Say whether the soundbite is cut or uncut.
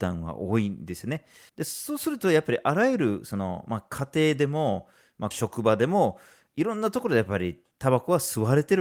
cut